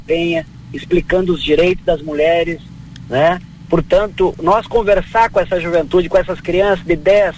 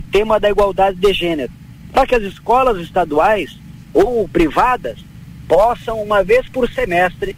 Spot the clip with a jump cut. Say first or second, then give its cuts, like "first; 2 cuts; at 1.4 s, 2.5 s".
first; 1 cut; at 3.7 s